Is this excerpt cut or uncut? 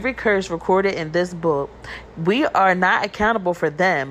cut